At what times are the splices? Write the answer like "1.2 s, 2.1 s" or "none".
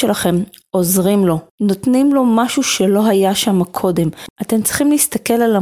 1.5 s